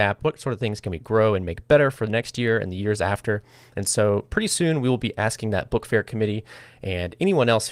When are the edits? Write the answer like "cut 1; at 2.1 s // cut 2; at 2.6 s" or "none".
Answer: none